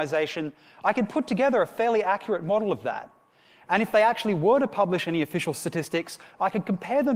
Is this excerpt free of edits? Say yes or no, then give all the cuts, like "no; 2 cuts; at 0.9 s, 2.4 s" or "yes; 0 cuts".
yes; 0 cuts